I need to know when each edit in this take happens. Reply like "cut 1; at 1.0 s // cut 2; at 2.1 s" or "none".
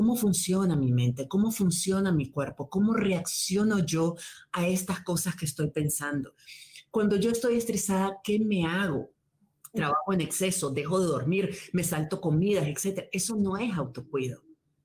none